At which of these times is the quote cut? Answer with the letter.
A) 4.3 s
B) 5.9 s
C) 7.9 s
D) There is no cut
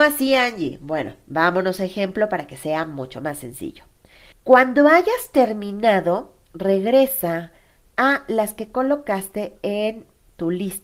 A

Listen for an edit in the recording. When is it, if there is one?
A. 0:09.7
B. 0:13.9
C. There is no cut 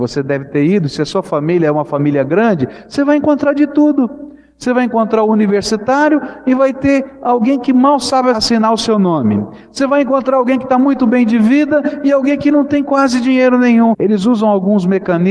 B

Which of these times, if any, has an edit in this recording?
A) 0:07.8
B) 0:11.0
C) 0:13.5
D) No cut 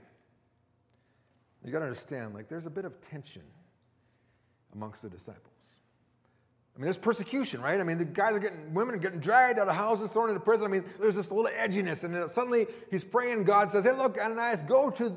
B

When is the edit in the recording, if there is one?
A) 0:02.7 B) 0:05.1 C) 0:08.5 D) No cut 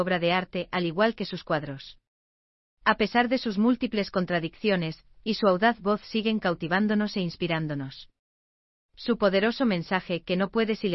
B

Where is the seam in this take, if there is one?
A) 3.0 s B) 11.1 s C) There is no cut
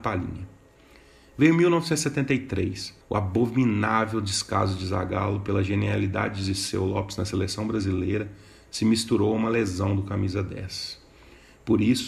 A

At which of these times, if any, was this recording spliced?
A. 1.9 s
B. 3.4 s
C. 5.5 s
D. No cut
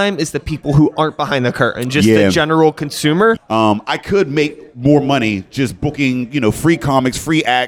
B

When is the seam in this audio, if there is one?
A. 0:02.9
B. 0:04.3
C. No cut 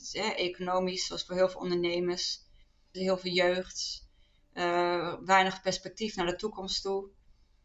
A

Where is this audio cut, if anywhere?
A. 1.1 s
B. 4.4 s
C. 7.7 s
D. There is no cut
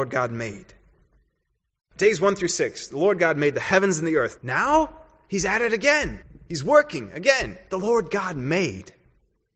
B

